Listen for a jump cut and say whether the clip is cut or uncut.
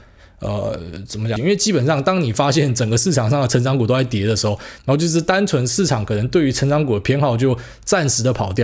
cut